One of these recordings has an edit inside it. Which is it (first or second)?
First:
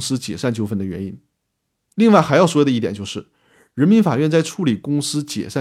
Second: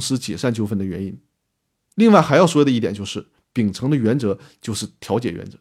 second